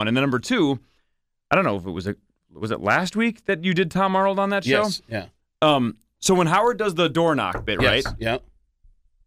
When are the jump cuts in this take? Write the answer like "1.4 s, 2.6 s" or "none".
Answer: none